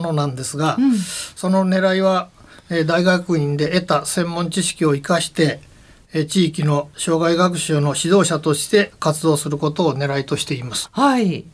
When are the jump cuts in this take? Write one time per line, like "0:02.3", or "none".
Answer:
none